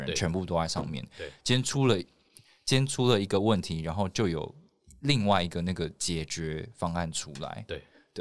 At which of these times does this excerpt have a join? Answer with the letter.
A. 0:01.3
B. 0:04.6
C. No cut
C